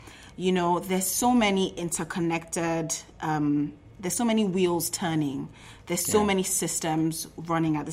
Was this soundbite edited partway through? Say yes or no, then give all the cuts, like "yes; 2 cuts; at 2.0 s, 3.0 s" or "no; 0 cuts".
no; 0 cuts